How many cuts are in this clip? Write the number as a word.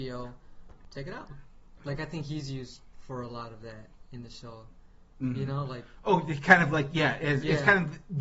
one